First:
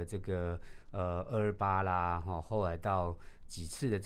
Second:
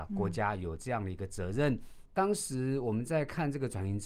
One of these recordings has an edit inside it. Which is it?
second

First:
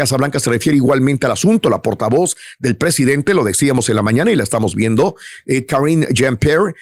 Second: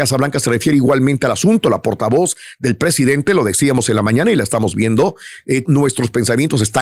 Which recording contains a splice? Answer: second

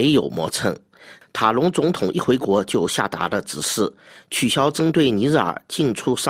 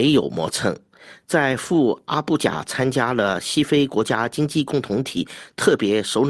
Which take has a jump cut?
first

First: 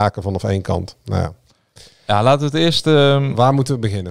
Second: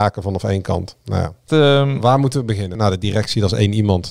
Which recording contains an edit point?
second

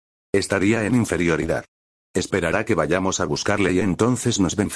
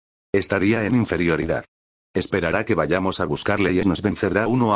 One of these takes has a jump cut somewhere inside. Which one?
second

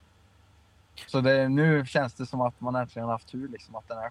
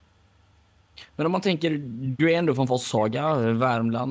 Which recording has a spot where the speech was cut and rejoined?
first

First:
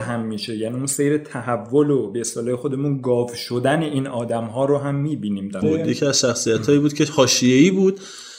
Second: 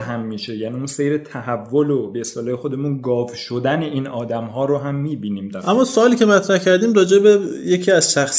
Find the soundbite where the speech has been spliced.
first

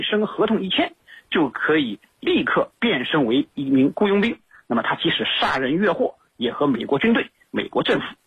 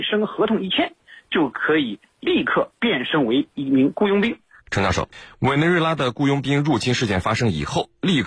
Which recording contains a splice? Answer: second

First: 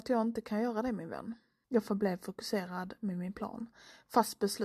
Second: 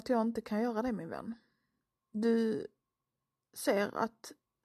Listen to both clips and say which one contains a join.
first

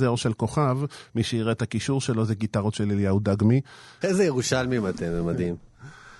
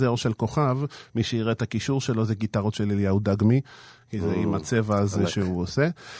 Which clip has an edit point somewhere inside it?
first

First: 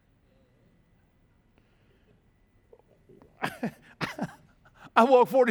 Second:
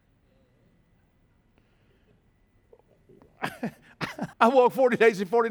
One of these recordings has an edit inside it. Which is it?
second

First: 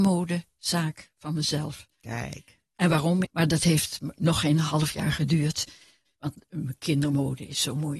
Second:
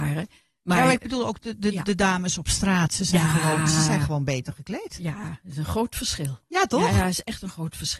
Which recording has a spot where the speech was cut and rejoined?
first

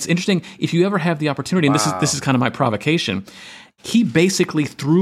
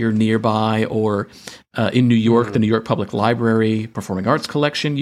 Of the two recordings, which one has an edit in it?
first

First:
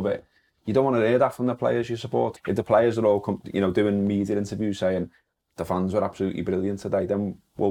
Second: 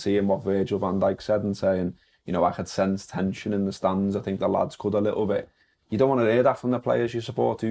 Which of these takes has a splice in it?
first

